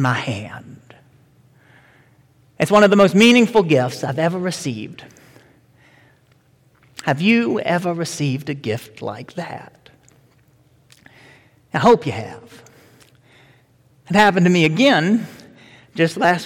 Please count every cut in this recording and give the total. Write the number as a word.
zero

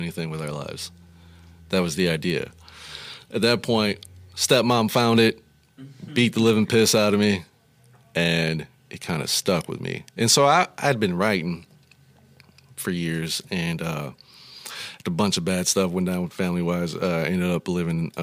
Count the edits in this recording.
zero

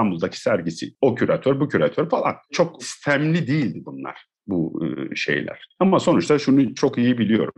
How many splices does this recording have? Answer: one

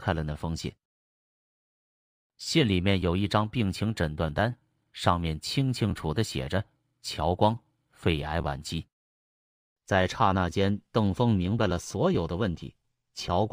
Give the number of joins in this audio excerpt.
two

